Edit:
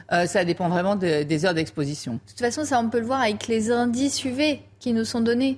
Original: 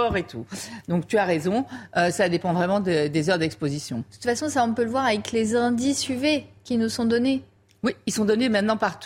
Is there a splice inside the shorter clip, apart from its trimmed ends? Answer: no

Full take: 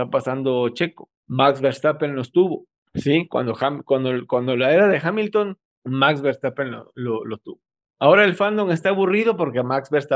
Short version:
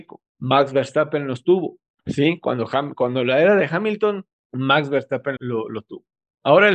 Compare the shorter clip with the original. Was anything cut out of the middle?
yes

